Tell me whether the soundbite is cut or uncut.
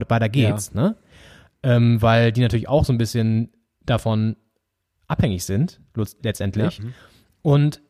cut